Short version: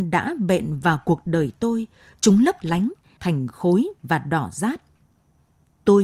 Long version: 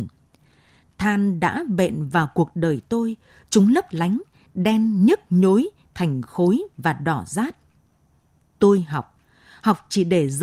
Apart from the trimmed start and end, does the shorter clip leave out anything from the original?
yes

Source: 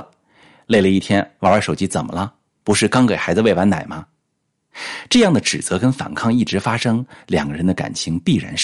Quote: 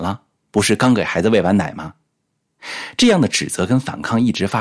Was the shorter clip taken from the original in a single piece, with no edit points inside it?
yes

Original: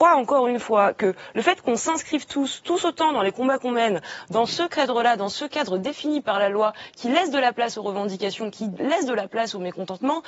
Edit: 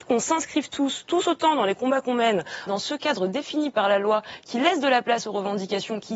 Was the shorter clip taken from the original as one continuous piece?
no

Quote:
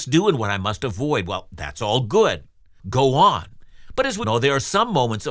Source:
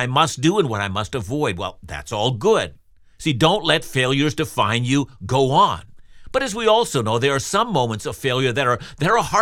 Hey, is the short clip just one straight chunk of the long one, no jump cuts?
no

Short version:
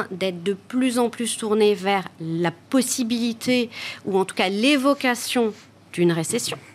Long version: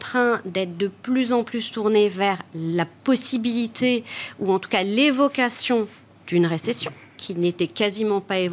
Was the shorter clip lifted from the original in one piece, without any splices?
yes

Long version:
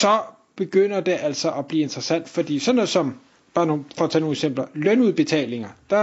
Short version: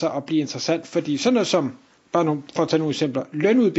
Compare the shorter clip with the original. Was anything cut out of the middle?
no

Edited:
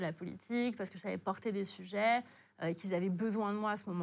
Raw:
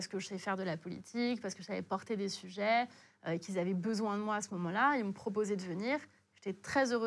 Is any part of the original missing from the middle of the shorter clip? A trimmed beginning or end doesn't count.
no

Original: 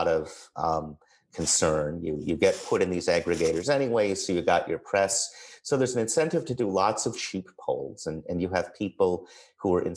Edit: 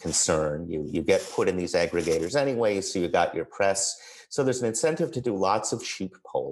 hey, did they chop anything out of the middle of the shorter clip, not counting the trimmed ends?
no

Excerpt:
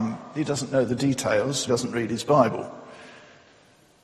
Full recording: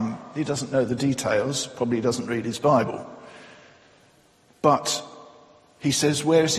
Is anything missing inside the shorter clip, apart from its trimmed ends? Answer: yes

